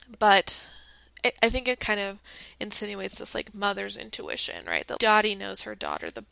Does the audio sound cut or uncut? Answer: cut